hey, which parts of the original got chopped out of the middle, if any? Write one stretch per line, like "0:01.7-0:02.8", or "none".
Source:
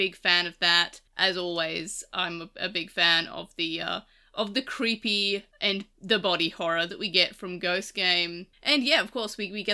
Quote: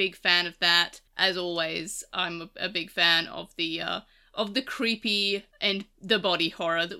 none